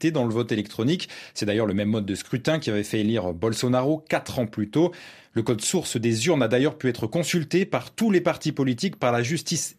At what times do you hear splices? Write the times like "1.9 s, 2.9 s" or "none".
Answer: none